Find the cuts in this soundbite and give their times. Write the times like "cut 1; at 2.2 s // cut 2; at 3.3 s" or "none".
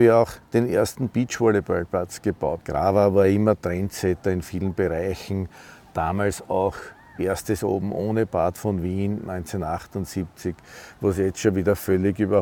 cut 1; at 2.6 s